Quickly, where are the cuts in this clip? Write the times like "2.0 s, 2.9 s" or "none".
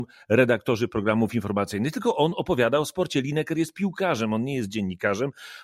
none

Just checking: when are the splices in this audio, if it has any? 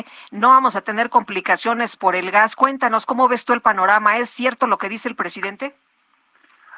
none

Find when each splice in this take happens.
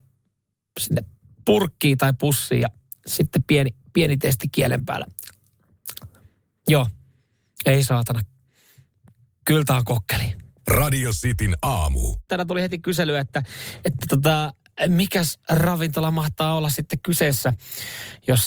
10.6 s

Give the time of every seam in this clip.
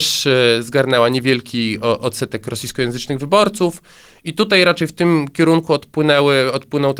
none

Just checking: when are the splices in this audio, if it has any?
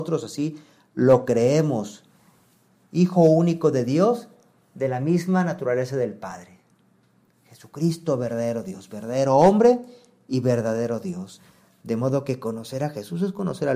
none

